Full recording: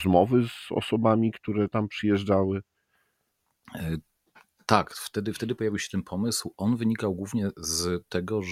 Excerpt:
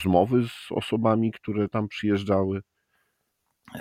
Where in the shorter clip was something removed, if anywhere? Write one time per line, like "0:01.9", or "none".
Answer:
none